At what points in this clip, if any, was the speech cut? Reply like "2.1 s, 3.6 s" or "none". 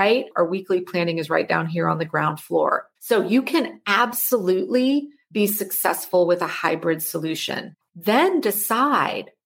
3.0 s, 7.9 s